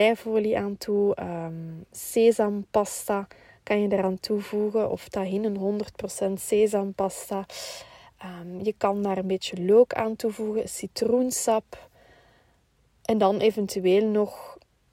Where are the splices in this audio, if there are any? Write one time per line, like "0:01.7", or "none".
none

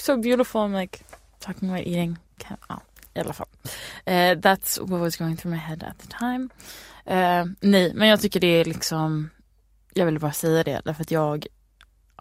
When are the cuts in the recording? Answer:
none

